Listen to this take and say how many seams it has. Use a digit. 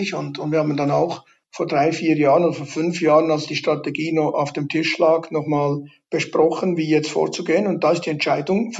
0